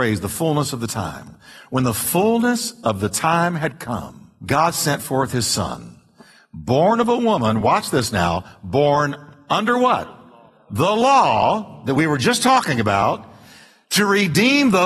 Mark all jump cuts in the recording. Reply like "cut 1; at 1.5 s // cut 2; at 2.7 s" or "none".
none